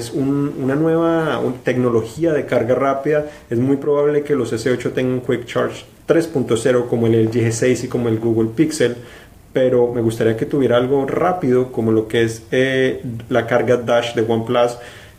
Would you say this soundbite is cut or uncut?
uncut